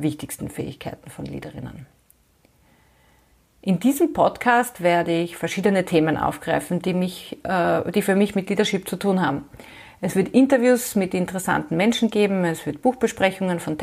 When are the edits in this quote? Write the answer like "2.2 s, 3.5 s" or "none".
none